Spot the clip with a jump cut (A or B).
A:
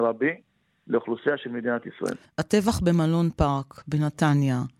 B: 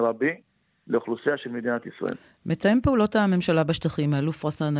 A